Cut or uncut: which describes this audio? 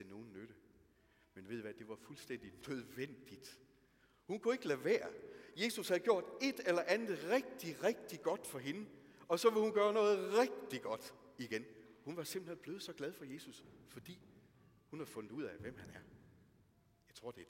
uncut